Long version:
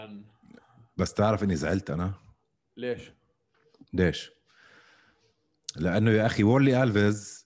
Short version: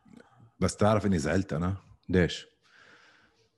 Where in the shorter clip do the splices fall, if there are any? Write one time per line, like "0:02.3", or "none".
0:02.0